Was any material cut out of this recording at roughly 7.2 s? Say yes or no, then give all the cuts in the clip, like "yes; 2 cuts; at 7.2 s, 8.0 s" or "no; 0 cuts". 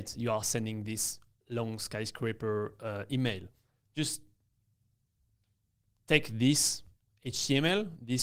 no; 1 cut; at 3.8 s